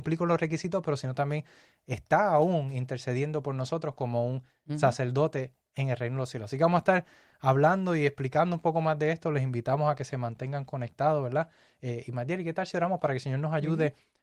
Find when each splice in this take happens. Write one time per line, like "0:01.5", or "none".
none

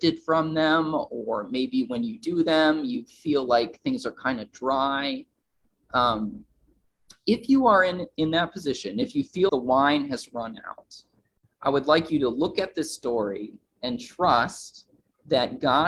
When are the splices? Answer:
0:09.5

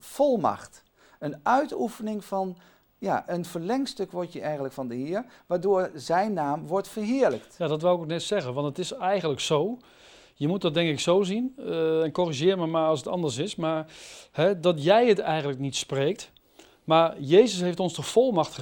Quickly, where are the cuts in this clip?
none

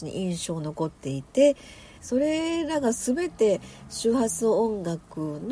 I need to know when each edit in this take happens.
0:02.0

